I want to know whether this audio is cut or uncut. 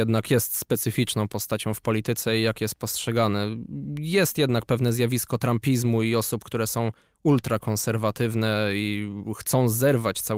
uncut